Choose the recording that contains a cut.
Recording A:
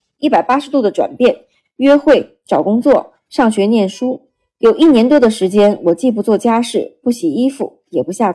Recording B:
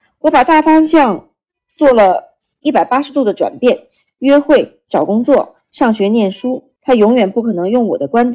B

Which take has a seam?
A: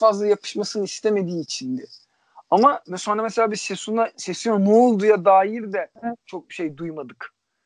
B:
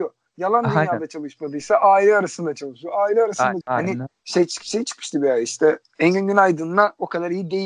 B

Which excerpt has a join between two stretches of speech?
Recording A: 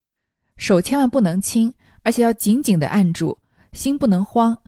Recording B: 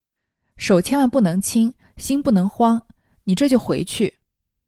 B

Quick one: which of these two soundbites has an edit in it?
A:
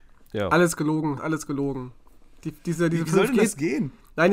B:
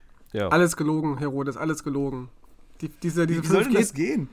A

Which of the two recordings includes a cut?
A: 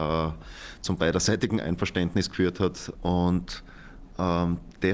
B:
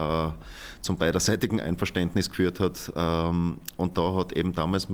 A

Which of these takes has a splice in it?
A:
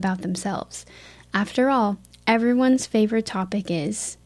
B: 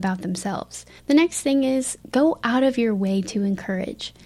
B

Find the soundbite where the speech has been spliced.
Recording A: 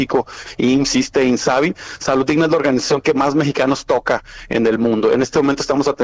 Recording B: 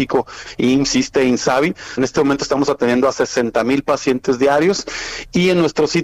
B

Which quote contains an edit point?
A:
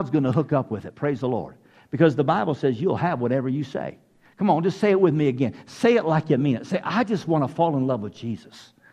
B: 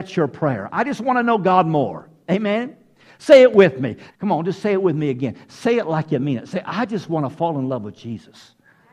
B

